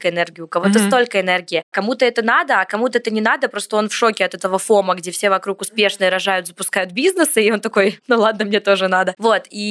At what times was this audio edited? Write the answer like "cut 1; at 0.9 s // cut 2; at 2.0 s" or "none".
none